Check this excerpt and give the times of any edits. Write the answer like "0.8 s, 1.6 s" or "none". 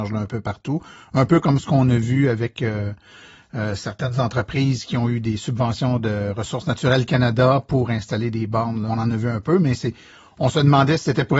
8.9 s